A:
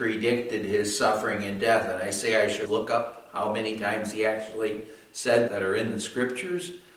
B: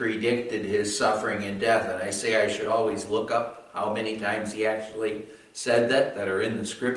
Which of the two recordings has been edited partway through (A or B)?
A